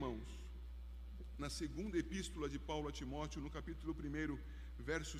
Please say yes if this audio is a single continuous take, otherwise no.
yes